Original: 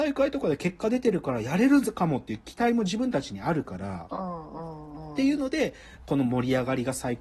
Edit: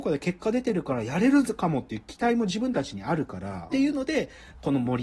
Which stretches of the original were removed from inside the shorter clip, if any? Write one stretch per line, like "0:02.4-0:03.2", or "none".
0:04.1-0:05.1